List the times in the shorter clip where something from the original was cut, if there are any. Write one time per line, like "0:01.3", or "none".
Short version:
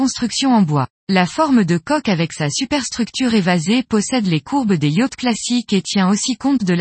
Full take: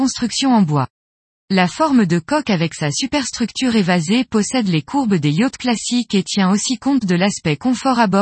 0:01.0